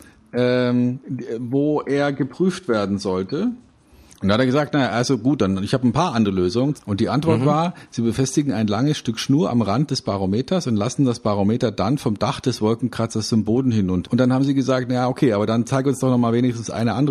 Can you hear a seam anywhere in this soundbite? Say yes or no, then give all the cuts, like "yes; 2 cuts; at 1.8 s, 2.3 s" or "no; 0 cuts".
yes; 3 cuts; at 4.1 s, 6.8 s, 14.0 s